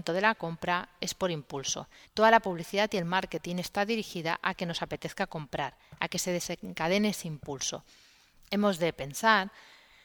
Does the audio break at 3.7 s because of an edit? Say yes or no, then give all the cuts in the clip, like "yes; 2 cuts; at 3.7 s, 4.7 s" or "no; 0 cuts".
no; 2 cuts; at 2.0 s, 8.4 s